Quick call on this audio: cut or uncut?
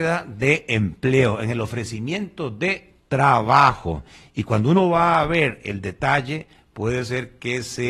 uncut